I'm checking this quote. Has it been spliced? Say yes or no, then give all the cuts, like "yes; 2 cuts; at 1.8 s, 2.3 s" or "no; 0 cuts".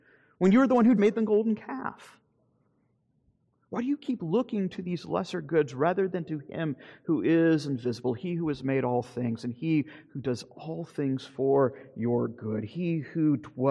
yes; 1 cut; at 1.0 s